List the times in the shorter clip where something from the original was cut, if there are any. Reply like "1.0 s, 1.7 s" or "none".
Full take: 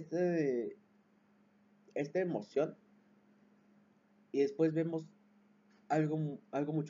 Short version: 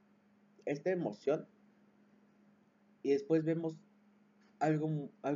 none